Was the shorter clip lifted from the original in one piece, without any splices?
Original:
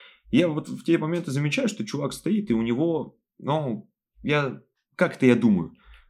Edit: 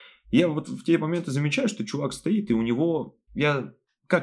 no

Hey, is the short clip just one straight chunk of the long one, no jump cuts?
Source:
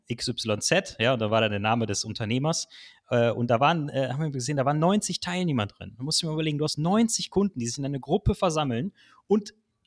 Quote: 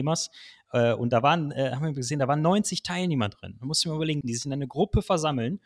no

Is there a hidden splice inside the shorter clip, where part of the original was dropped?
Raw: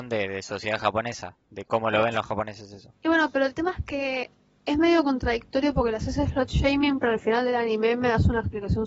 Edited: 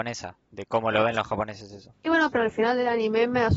yes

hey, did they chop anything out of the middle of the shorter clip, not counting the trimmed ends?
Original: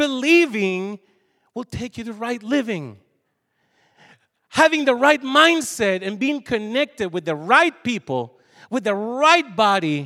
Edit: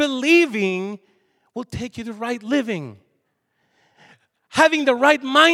no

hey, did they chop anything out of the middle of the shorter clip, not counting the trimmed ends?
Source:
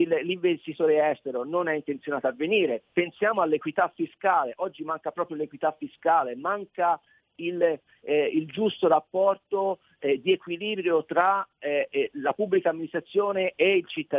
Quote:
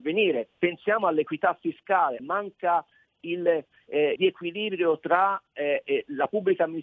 yes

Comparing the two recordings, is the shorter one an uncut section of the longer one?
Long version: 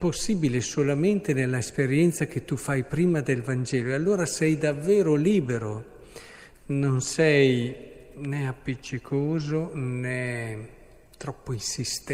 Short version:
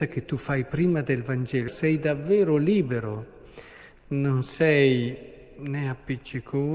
no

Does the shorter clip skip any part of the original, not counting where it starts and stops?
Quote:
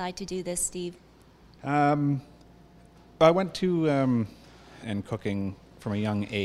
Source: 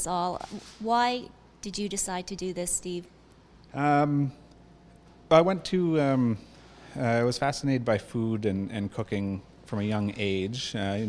yes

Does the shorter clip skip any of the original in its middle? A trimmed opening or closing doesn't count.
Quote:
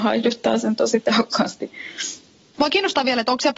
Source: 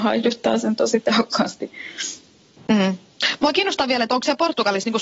yes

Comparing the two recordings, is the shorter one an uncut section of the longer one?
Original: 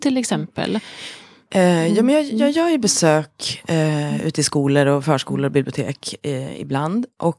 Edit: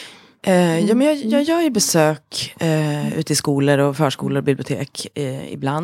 yes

